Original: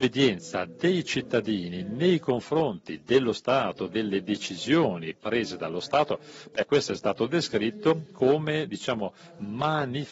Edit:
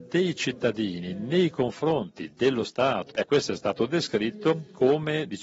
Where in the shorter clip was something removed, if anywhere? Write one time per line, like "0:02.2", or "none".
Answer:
0:03.1